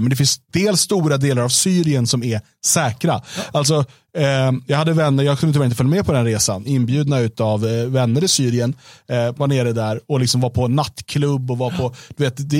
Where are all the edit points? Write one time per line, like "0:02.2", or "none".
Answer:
0:06.7
0:09.3